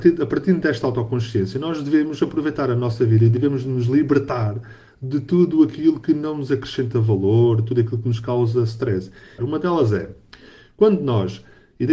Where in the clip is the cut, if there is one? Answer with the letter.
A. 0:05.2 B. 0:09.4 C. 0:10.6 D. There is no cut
B